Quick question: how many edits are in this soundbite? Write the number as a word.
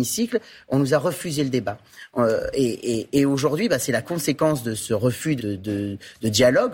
one